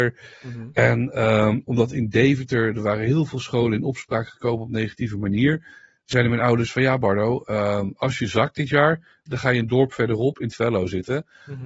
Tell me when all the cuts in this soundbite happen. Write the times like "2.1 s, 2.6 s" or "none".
9.3 s